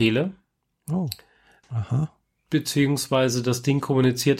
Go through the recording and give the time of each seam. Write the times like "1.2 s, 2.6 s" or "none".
1.6 s